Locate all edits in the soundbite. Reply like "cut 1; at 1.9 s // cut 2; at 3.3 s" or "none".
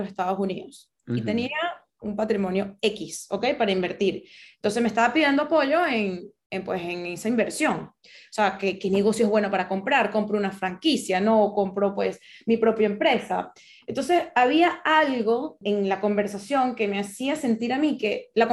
cut 1; at 15.6 s